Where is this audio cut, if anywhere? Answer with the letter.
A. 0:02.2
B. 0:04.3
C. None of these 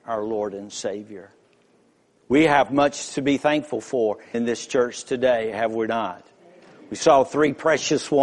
B